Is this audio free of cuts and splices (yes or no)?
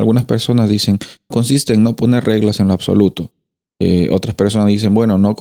no